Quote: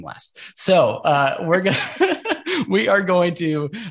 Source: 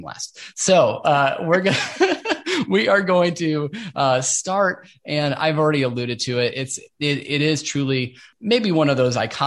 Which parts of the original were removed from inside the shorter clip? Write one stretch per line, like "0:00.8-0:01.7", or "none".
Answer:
none